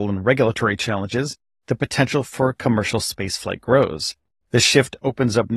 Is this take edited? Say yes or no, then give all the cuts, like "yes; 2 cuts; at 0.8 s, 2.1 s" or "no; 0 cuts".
yes; 1 cut; at 4.4 s